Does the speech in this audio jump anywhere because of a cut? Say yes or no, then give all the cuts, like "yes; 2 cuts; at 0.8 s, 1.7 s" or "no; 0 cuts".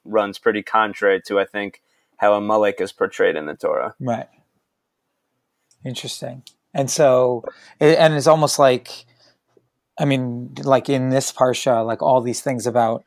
no; 0 cuts